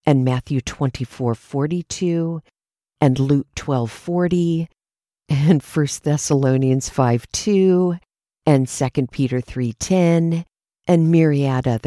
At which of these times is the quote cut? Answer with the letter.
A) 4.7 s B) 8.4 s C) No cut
C